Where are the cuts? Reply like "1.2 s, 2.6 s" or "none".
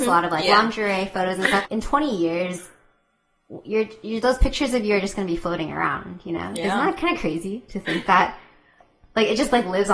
1.6 s